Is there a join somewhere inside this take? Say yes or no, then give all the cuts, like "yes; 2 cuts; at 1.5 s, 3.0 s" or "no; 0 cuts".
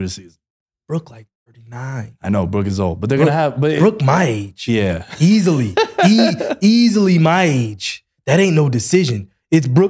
no; 0 cuts